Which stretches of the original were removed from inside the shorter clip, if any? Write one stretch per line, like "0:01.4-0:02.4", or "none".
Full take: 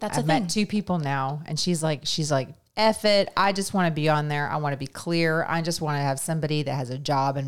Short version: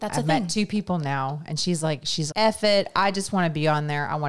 0:02.3-0:02.7